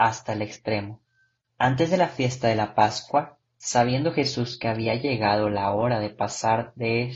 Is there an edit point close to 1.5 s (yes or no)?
yes